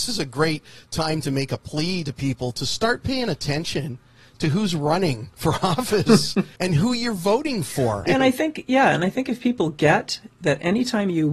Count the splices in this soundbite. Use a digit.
2